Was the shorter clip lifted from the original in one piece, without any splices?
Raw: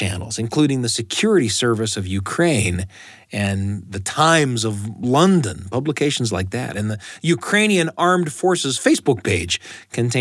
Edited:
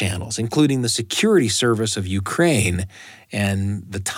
yes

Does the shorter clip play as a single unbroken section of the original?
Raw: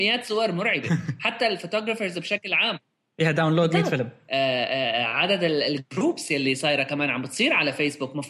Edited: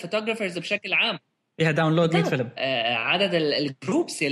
no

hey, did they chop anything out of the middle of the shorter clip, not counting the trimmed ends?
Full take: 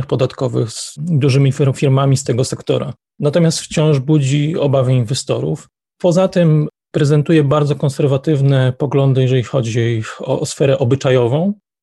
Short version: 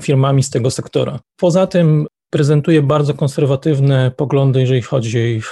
yes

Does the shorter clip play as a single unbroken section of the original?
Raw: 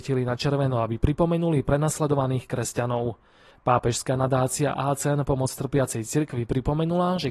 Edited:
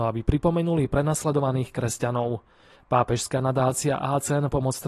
yes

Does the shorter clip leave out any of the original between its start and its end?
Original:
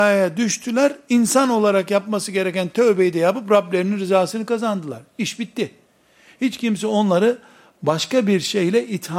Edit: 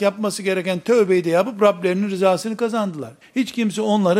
yes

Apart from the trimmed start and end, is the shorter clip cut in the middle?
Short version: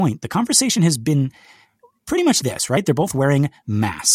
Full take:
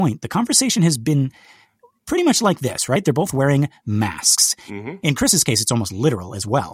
yes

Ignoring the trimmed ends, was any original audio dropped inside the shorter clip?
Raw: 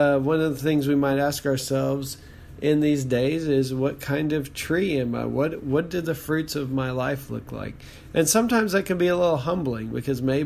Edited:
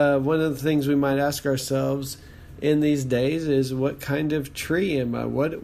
no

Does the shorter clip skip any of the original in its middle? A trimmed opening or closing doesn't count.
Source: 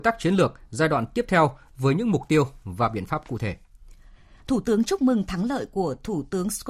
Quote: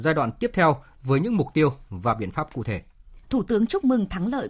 yes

